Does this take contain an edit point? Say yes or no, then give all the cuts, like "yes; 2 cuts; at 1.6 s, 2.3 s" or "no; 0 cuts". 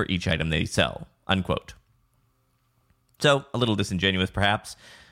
no; 0 cuts